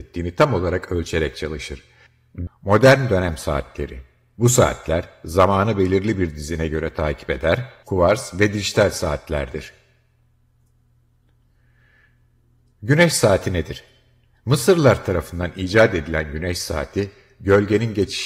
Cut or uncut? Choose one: cut